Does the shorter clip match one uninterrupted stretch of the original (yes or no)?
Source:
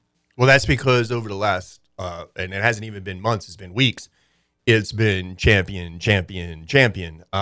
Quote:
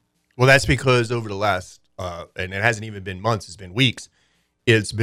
yes